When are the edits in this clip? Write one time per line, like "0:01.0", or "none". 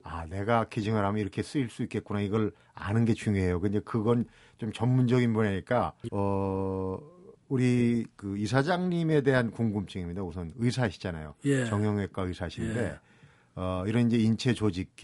0:06.1